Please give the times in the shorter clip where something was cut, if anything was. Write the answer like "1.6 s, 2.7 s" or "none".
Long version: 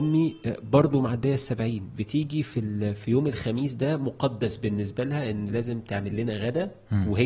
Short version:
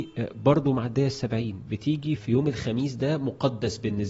2.2 s